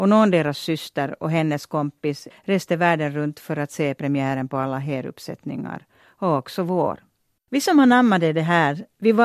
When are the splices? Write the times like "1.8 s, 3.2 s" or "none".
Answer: 2.3 s, 7.4 s